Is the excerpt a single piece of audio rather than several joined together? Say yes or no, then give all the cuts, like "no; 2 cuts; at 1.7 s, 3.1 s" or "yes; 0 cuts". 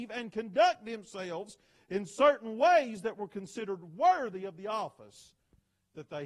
yes; 0 cuts